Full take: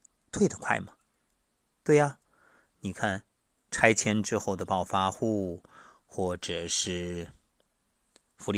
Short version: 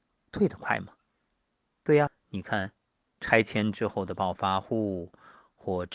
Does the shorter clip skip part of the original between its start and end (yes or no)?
yes